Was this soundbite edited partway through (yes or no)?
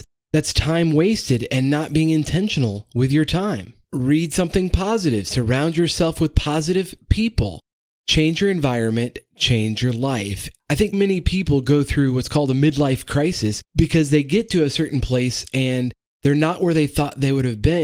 yes